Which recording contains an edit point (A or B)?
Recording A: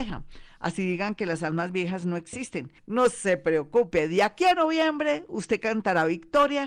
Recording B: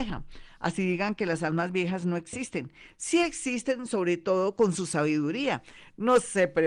A